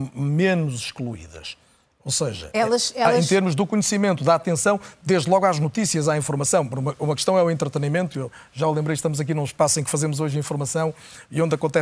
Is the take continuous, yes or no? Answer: yes